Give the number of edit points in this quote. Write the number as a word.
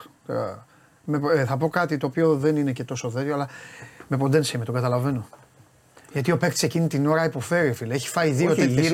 one